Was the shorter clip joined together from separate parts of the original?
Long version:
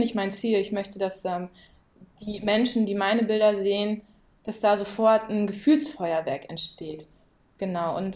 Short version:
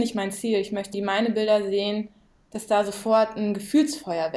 yes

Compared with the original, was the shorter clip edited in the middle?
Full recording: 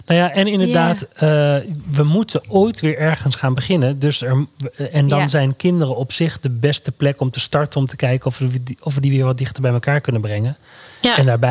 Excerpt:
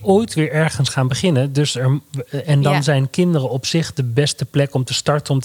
no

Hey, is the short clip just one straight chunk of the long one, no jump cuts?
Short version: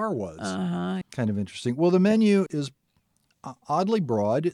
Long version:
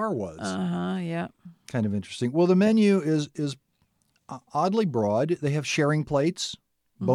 no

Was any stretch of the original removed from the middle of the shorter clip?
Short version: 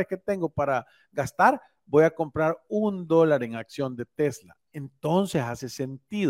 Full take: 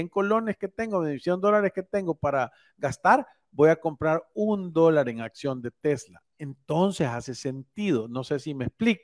no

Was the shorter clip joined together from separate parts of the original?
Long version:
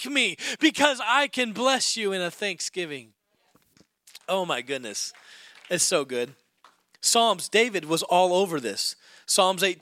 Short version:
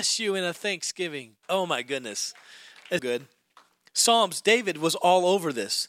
yes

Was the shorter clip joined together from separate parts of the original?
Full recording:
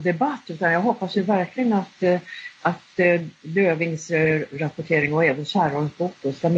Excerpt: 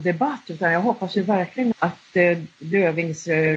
yes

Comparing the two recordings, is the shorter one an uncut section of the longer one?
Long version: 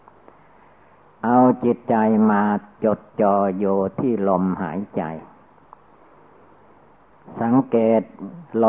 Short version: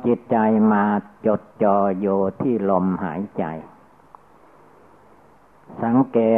yes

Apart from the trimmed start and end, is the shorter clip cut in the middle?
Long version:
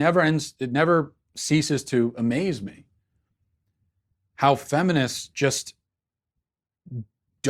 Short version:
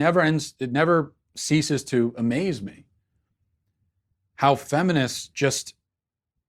no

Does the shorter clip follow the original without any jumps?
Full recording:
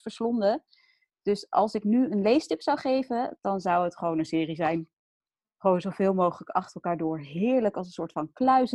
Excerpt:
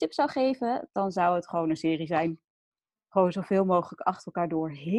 yes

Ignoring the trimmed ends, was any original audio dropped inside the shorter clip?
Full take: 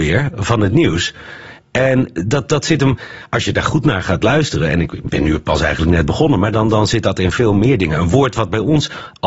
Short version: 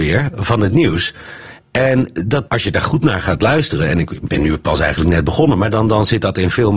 yes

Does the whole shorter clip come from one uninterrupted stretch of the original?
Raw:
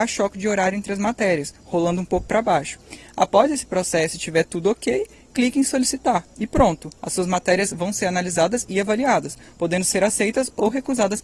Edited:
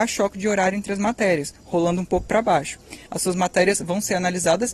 no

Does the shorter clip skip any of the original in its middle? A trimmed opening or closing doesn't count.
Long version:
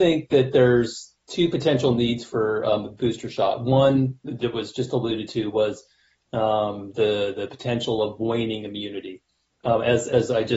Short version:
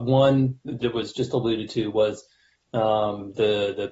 no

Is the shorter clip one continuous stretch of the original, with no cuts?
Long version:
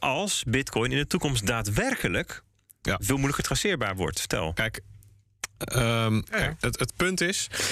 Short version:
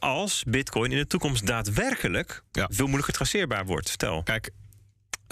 no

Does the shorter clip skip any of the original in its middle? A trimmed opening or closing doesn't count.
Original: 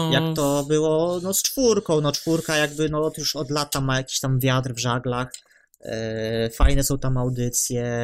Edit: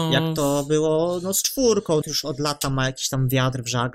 yes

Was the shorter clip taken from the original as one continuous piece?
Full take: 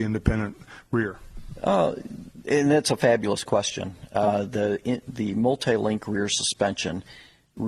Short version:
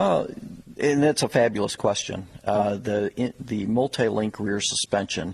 yes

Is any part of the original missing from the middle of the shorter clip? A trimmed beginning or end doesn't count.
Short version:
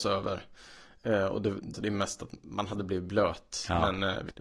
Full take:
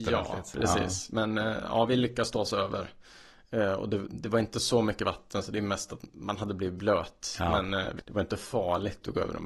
yes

